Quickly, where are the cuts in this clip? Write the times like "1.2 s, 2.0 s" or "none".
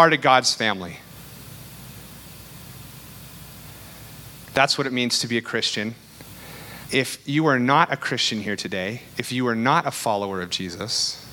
4.5 s, 6.9 s